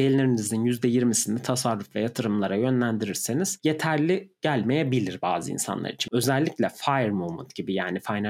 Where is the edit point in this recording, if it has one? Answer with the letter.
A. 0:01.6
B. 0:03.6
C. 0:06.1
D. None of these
C